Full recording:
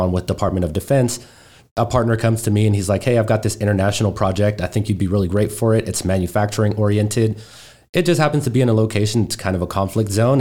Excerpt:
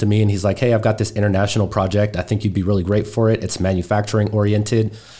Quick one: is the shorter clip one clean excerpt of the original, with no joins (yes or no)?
yes